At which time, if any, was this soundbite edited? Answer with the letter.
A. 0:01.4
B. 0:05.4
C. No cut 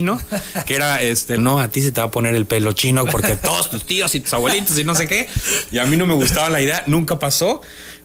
A